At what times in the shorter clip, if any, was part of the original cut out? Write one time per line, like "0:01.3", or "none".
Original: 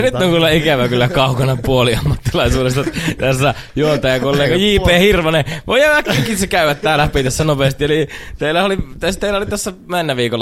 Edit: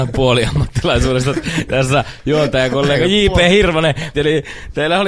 0:04.1